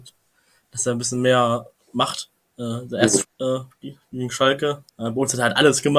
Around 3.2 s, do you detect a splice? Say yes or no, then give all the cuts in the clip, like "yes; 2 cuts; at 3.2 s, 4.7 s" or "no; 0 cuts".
yes; 2 cuts; at 3.2 s, 4.9 s